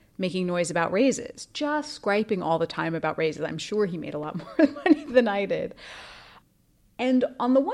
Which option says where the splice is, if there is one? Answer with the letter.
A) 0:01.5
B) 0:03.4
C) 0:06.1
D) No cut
D